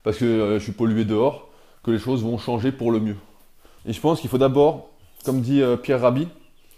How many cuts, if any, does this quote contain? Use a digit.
1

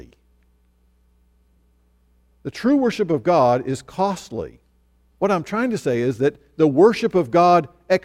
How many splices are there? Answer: 1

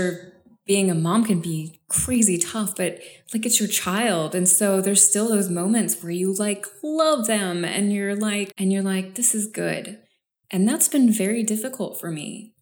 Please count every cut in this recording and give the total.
2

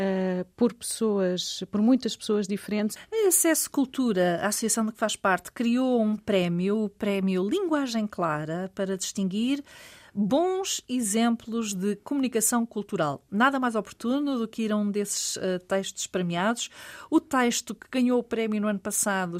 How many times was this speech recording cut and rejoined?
0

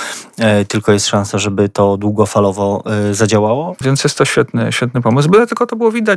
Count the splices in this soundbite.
1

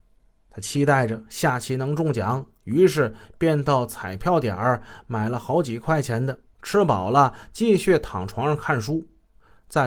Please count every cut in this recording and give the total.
1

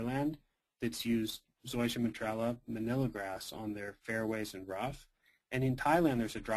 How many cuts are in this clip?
0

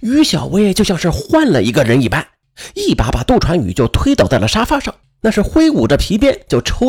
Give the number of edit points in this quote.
0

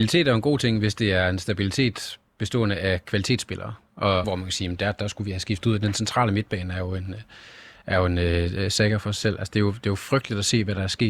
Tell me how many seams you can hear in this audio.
1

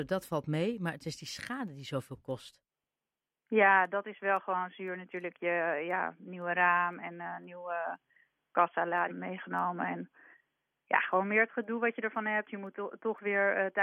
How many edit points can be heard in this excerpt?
1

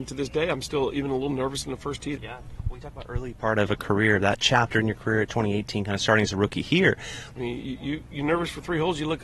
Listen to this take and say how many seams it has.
2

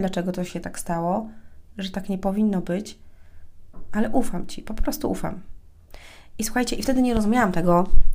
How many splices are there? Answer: 1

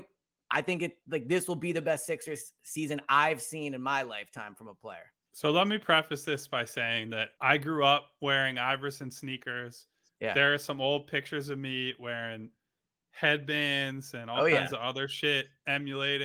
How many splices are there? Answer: 2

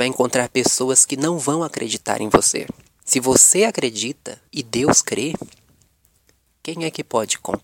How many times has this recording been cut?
2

